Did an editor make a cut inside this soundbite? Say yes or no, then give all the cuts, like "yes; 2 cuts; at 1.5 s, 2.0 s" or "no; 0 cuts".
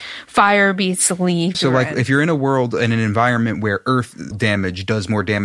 yes; 2 cuts; at 1.5 s, 4.3 s